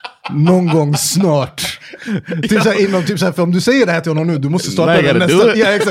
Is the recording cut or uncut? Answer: uncut